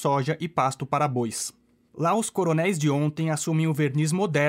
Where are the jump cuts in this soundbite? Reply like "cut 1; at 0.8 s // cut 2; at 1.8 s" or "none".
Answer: cut 1; at 1.9 s